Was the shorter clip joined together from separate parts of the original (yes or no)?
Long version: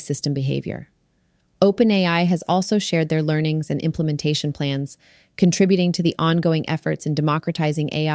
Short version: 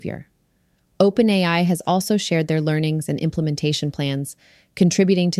no